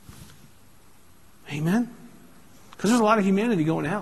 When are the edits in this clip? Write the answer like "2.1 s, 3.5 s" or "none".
none